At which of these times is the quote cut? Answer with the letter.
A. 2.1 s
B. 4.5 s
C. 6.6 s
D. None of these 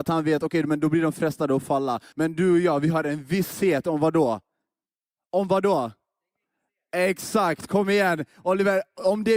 A